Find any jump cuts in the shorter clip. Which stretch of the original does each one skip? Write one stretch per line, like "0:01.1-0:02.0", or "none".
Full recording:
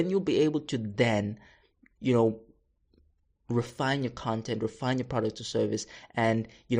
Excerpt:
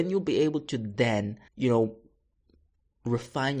0:01.5-0:01.9

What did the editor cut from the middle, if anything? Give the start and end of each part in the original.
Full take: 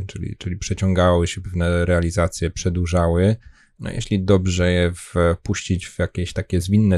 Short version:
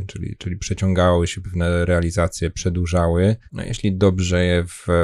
0:03.5-0:03.7

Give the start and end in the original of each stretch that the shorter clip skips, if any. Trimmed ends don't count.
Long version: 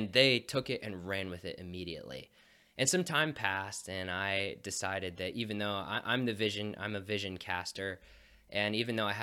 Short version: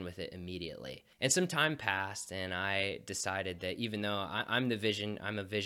0:02.4-0:02.7

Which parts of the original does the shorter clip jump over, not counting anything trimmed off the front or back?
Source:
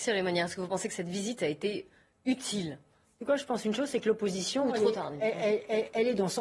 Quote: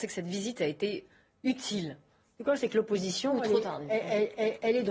0:03.4-0:03.9

